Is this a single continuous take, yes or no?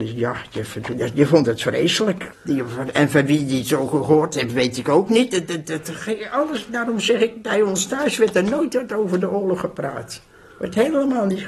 no